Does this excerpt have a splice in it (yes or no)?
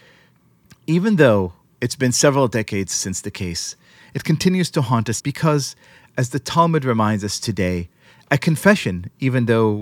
yes